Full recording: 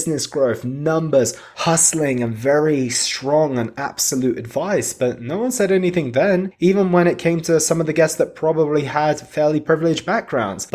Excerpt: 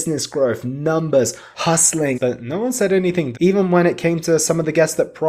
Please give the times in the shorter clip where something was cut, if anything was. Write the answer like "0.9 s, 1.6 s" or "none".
2.1 s, 3.3 s